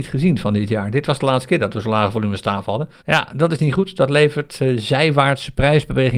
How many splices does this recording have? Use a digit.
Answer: 1